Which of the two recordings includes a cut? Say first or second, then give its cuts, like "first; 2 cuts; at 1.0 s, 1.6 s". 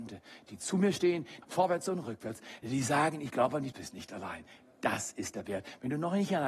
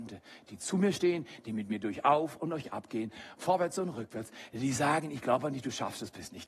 first; 2 cuts; at 1.4 s, 3.7 s